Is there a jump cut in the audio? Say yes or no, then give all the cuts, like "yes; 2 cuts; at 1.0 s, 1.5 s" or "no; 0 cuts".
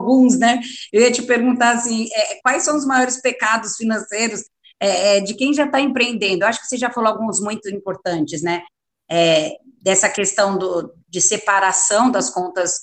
no; 0 cuts